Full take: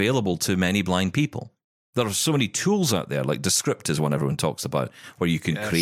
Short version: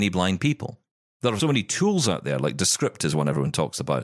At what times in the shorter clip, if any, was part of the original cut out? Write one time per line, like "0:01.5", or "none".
0:01.4